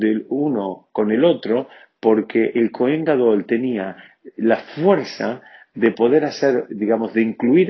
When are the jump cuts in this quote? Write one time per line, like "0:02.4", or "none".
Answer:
0:06.7